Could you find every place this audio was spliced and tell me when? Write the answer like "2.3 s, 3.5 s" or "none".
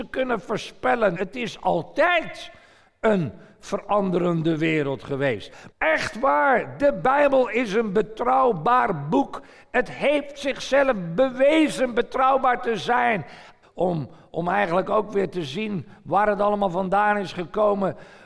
1.2 s, 5.7 s, 13.6 s